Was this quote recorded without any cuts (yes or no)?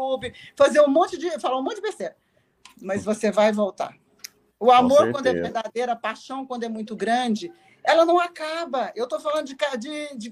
yes